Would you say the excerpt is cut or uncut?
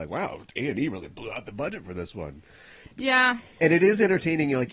uncut